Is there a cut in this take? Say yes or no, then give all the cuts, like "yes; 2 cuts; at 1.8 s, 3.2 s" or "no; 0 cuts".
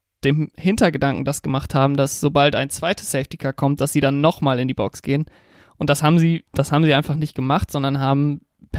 no; 0 cuts